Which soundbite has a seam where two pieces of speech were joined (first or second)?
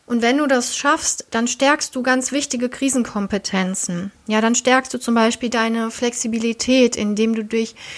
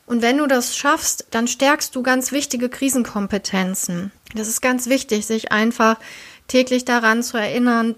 second